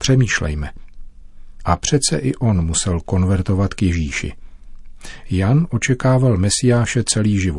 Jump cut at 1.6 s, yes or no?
yes